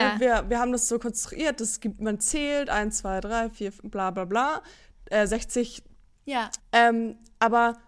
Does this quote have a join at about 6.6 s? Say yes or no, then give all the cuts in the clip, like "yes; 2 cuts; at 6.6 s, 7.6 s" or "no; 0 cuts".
yes; 1 cut; at 6.6 s